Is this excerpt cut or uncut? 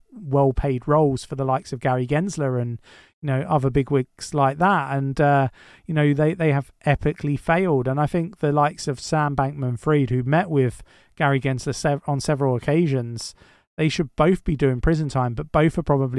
uncut